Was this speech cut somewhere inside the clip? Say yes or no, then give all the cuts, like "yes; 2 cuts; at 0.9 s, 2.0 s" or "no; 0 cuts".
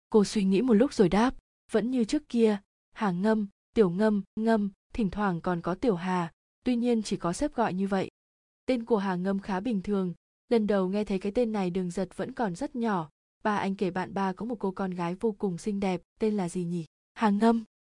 yes; 1 cut; at 4.4 s